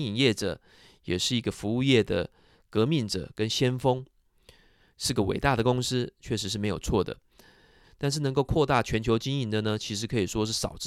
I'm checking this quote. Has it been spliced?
yes; 1 cut; at 7.8 s

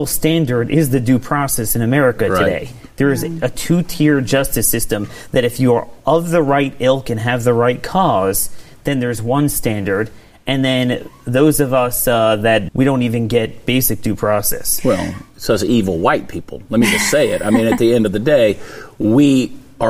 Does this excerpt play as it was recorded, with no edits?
no; 1 cut; at 12.7 s

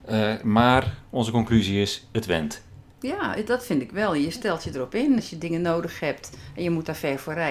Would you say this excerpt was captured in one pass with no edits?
yes; 0 cuts

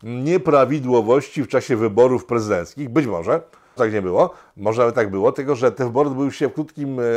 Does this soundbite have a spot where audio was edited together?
yes; 1 cut; at 3.8 s

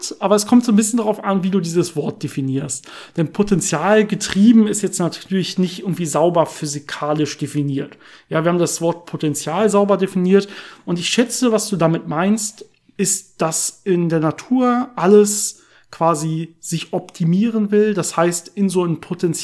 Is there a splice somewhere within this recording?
no; 0 cuts

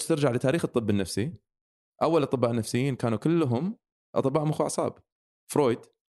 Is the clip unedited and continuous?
yes; 0 cuts

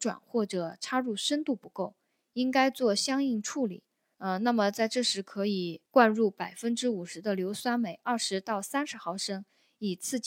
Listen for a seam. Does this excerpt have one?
yes; 2 cuts; at 4.1 s, 5.9 s

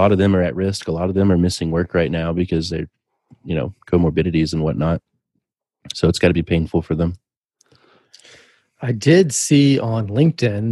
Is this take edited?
no; 0 cuts

